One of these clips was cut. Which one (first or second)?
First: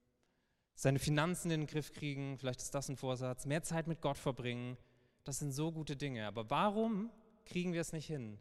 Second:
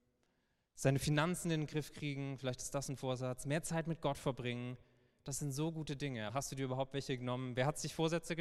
second